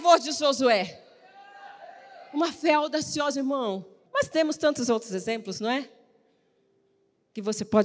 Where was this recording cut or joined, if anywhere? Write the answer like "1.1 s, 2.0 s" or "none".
4.1 s